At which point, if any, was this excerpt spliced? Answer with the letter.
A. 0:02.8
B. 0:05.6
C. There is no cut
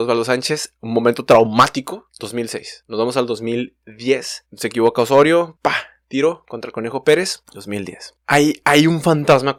B